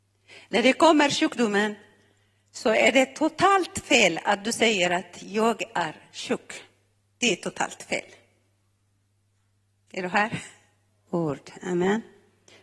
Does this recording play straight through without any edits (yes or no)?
no